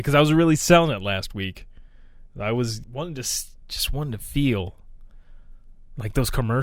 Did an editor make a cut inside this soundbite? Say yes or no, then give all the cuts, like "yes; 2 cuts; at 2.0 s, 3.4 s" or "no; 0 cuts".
yes; 1 cut; at 2.8 s